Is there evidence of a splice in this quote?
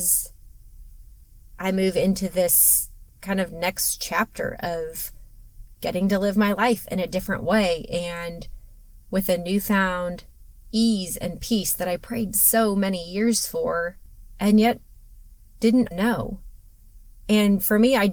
yes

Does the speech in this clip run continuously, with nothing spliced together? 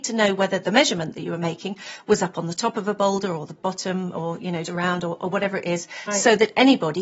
no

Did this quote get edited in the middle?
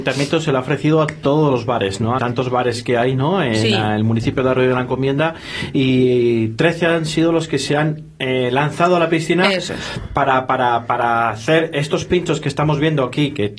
yes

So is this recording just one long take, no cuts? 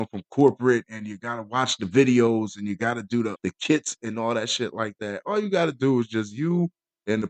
no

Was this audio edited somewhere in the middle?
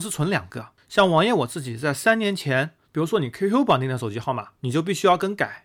yes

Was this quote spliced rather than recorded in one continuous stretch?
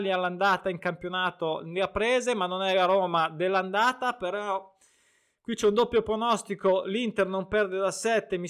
no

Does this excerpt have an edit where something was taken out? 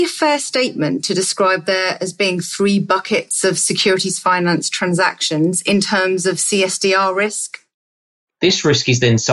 yes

